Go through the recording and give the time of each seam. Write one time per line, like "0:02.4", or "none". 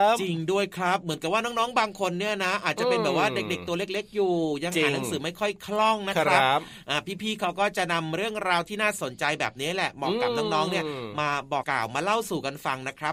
0:11.6